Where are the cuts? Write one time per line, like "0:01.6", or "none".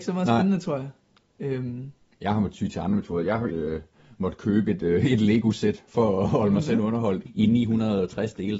0:03.5
0:07.3